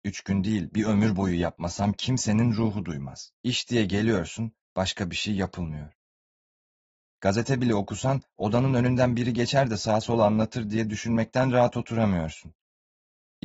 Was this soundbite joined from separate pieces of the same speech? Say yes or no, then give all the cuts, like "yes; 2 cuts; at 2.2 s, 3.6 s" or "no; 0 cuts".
yes; 1 cut; at 3.3 s